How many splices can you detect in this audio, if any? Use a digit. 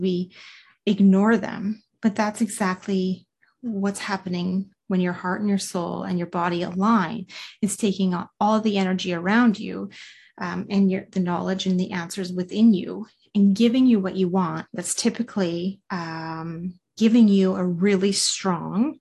2